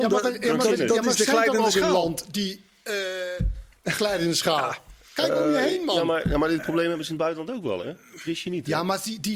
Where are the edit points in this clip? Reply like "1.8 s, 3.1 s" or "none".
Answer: none

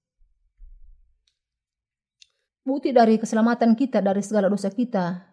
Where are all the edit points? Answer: 2.4 s

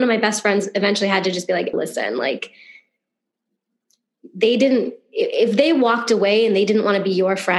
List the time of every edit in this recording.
1.7 s

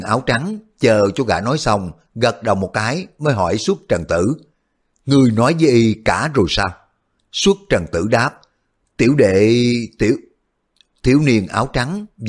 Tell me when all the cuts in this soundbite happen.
none

